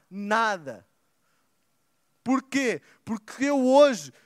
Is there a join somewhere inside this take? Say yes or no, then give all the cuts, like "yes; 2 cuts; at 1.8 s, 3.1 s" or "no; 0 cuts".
no; 0 cuts